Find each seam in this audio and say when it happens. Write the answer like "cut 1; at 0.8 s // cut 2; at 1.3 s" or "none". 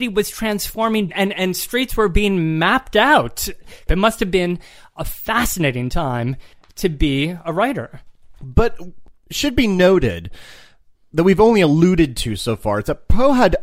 cut 1; at 3.9 s